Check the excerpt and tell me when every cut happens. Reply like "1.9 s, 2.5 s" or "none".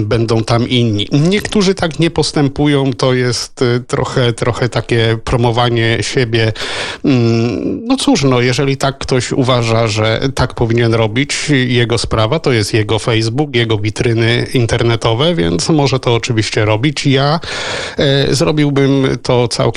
none